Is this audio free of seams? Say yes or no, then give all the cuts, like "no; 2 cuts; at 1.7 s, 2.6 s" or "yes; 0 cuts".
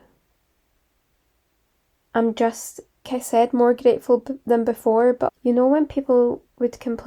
no; 2 cuts; at 3.1 s, 5.3 s